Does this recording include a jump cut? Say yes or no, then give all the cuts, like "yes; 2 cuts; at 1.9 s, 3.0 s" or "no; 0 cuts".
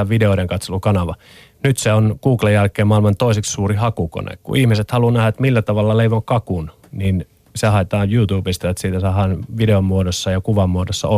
no; 0 cuts